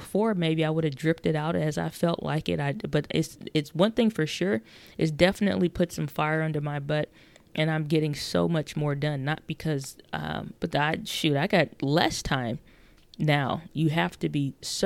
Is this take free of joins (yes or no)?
no